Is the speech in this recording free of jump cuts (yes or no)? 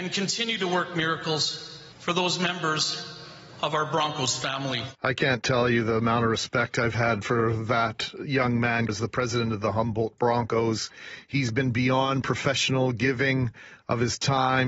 no